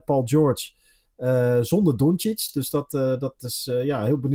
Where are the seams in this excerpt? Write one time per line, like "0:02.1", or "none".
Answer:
none